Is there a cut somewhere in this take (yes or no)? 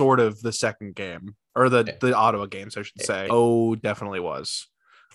yes